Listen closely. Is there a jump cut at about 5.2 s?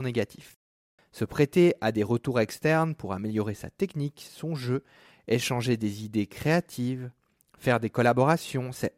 no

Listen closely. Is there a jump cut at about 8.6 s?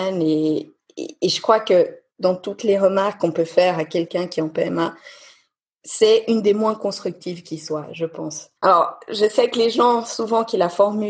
yes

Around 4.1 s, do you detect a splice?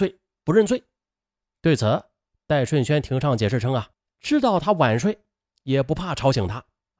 yes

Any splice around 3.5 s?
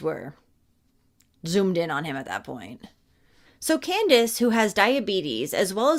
yes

